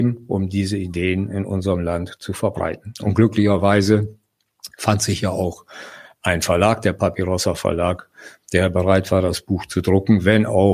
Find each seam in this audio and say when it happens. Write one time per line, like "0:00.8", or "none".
none